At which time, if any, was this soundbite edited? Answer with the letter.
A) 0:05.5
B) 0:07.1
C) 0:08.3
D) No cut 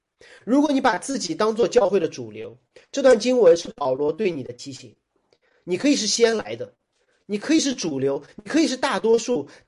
D